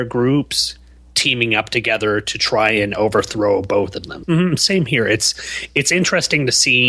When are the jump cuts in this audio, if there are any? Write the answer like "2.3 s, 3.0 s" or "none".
4.2 s